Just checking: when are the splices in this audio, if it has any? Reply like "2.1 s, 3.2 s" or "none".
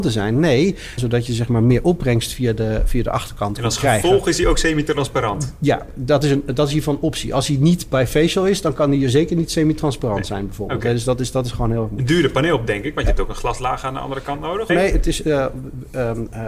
1.0 s, 14.7 s